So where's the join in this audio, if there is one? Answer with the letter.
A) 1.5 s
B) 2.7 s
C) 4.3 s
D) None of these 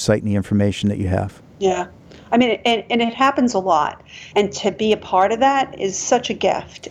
C